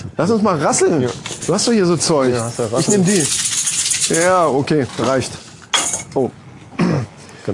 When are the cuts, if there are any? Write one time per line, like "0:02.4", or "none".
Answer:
none